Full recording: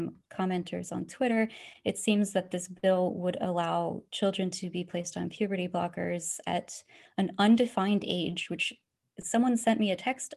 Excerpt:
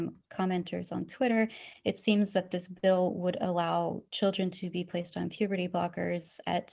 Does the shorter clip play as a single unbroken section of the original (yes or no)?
yes